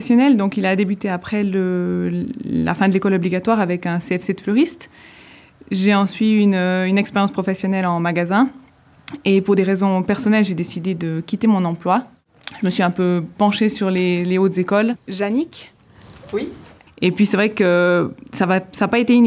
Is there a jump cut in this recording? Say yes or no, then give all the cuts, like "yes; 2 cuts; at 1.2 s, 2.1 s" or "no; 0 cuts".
yes; 2 cuts; at 15.0 s, 16.9 s